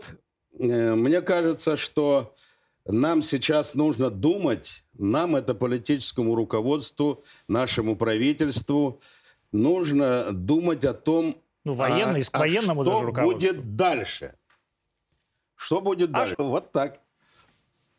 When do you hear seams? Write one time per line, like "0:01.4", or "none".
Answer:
0:16.3